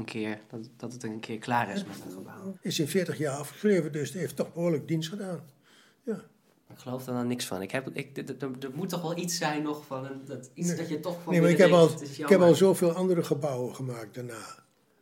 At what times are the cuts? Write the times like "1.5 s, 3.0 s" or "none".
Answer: 2.5 s